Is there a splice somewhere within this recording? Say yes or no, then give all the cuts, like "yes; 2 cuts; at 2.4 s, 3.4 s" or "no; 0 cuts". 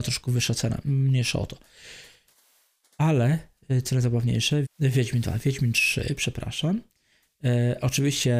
yes; 1 cut; at 4.6 s